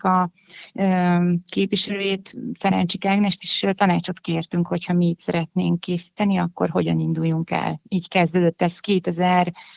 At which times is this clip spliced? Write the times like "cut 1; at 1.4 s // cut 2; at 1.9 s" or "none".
none